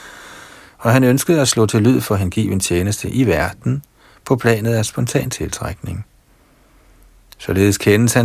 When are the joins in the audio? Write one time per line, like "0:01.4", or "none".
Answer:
none